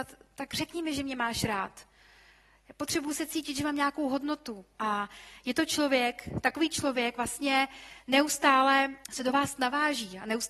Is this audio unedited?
no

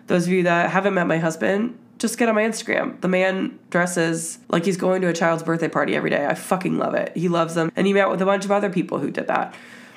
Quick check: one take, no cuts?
no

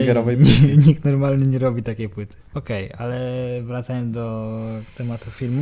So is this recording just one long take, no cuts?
no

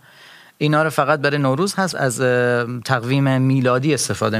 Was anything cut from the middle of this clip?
yes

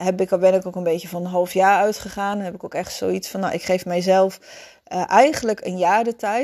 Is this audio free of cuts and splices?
yes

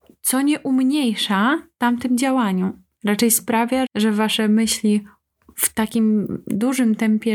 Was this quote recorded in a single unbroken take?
no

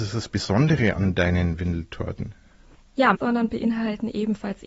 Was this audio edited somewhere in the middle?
yes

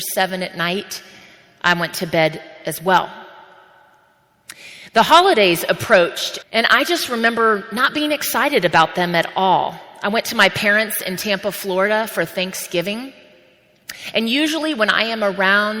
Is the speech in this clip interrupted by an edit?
yes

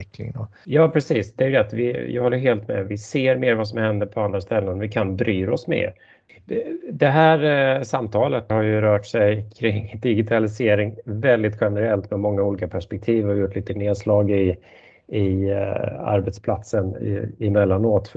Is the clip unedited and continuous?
no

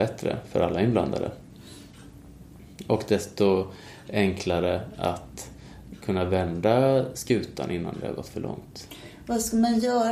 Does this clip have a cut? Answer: no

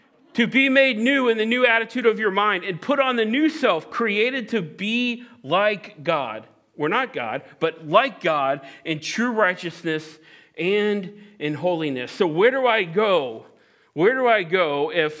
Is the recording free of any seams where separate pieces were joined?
yes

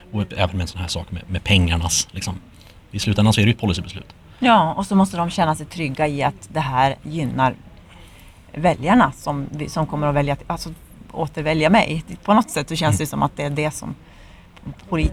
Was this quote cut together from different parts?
no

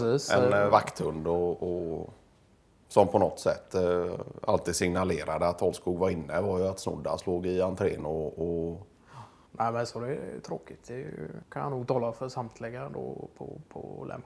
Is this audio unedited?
yes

